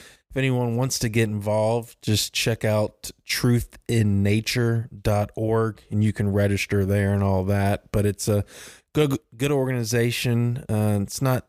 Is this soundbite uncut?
yes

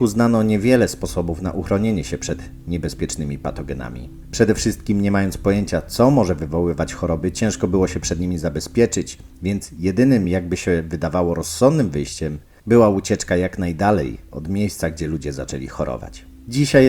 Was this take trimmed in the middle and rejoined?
no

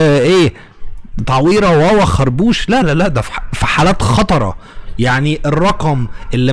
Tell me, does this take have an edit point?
yes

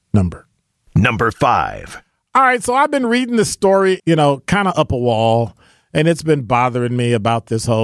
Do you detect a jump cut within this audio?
yes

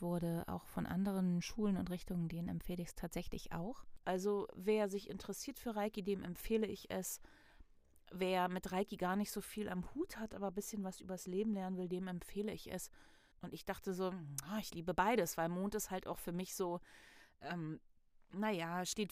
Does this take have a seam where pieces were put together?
yes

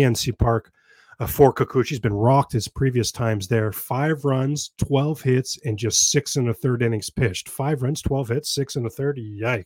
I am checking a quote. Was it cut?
no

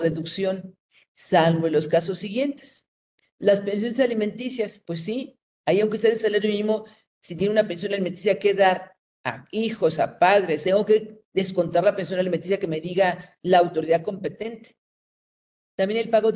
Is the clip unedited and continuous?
no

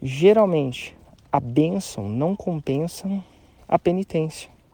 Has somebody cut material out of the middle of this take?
no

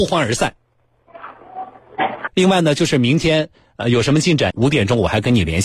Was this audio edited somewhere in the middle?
yes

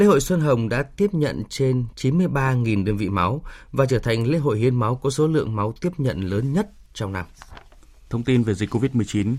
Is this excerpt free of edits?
yes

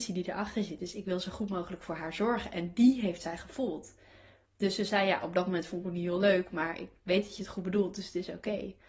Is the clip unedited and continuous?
yes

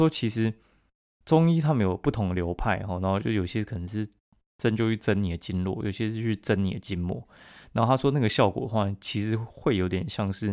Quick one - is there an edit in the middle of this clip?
no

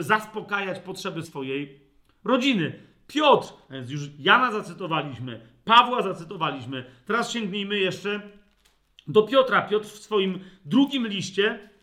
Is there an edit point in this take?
yes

